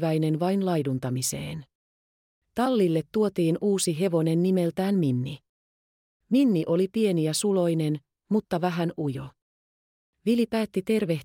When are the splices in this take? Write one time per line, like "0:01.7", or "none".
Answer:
0:02.4